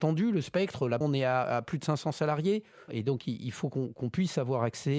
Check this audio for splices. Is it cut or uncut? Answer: cut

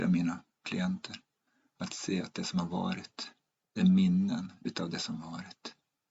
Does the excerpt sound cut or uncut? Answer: cut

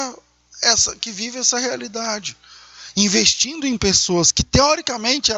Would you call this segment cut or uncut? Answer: uncut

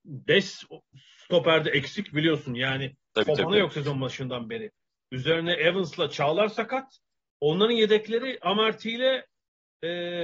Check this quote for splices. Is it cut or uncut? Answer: uncut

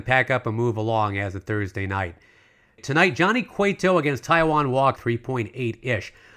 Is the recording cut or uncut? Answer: cut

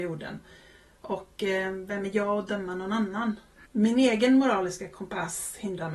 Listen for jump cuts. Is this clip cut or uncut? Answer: cut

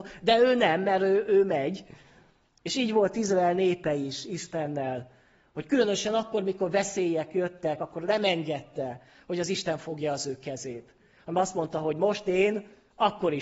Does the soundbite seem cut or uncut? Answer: uncut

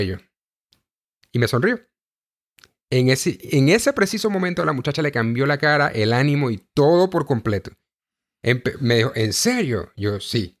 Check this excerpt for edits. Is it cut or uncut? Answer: uncut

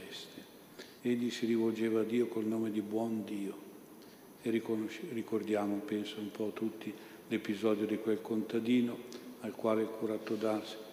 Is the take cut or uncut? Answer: cut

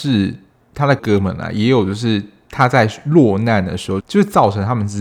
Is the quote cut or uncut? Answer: cut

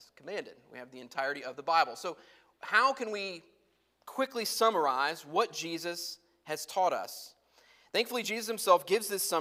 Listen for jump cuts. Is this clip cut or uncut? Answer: uncut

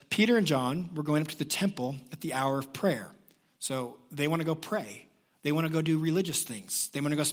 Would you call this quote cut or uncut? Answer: uncut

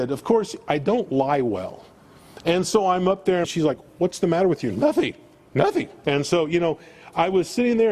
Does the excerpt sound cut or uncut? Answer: cut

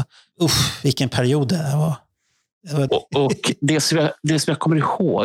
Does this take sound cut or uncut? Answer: cut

